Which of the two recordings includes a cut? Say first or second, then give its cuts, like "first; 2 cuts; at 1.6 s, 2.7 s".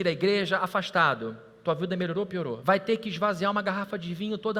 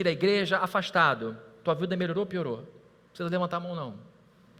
first; 1 cut; at 2.6 s